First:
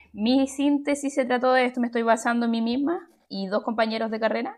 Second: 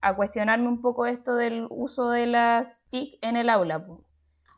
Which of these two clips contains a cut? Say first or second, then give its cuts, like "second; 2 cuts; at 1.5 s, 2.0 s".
first; 1 cut; at 1.7 s